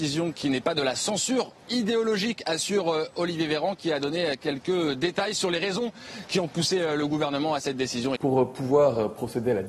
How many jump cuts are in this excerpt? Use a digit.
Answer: 1